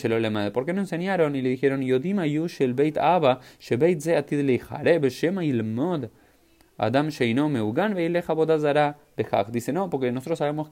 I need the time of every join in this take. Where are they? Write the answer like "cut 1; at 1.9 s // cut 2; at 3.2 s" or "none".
none